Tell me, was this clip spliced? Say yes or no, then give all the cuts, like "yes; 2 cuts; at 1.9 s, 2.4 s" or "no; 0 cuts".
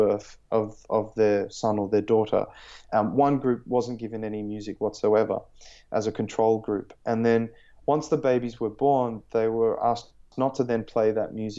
no; 0 cuts